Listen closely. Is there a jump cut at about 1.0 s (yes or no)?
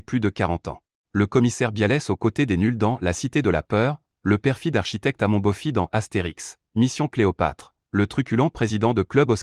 yes